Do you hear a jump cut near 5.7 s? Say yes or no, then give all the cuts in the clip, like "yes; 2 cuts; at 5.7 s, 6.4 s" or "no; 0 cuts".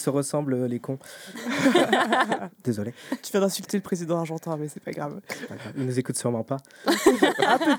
no; 0 cuts